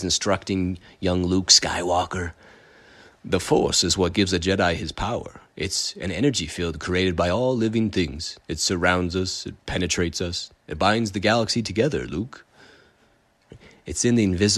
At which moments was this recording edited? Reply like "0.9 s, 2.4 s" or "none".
none